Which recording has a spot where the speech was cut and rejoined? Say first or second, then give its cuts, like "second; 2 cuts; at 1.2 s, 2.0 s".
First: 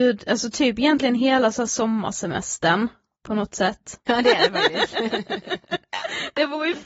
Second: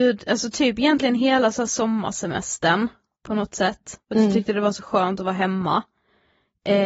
first; 1 cut; at 4.0 s